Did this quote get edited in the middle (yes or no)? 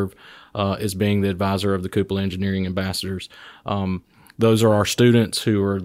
no